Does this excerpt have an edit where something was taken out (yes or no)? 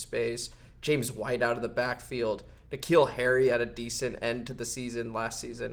yes